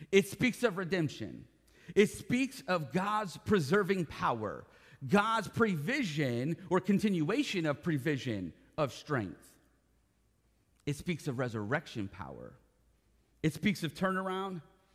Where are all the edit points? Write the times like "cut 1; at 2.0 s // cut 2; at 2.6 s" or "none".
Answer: none